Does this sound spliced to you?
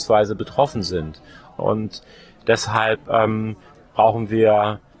yes; 1 cut; at 1.6 s

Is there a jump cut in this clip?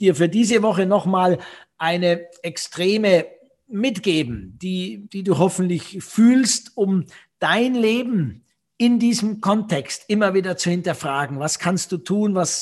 no; 0 cuts

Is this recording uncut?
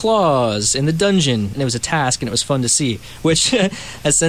no; 1 cut; at 1.5 s

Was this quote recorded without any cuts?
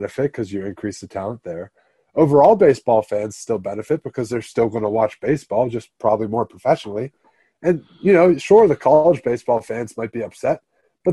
yes; 0 cuts

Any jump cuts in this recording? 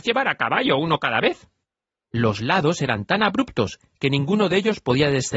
yes; 1 cut; at 2.0 s

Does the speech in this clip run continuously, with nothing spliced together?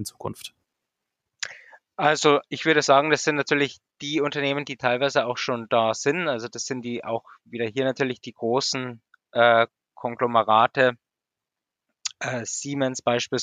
yes; 0 cuts

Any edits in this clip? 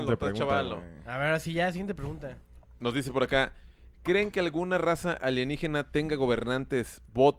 no; 0 cuts

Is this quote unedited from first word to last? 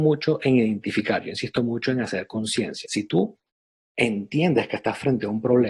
no; 1 cut; at 2.8 s

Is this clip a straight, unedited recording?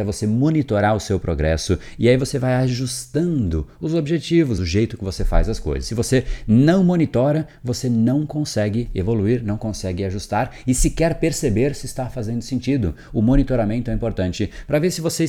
no; 1 cut; at 4.6 s

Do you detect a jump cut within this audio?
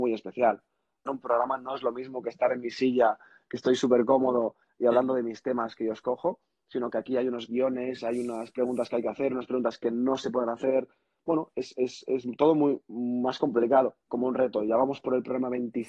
yes; 2 cuts; at 1.1 s, 14.1 s

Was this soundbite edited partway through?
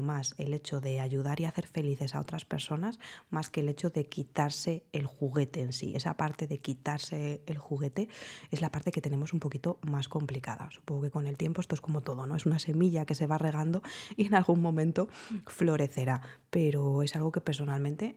no; 0 cuts

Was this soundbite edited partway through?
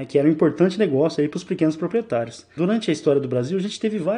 yes; 1 cut; at 2.6 s

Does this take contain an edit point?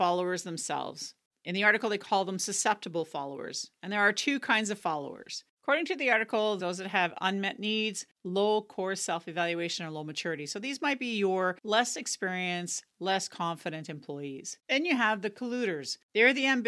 yes; 1 cut; at 6.6 s

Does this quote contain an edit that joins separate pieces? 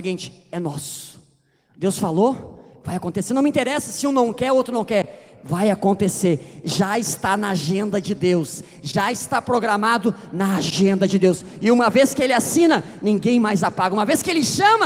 no; 0 cuts

